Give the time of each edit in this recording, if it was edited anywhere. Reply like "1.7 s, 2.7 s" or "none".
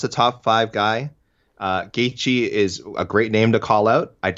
none